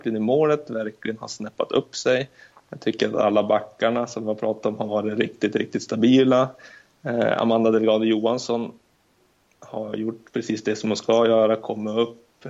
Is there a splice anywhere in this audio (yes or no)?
no